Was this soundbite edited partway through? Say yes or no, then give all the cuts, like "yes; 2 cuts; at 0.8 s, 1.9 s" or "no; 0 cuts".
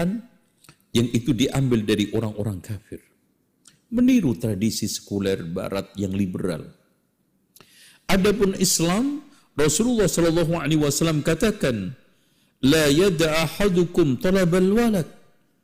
no; 0 cuts